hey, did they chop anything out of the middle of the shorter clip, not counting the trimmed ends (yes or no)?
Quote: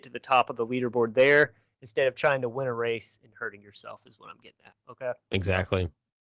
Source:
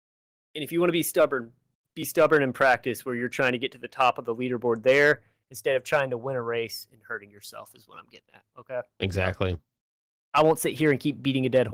no